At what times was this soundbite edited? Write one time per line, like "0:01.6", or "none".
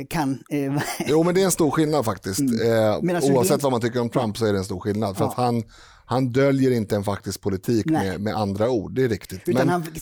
none

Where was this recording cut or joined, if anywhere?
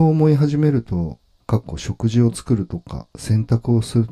0:01.4

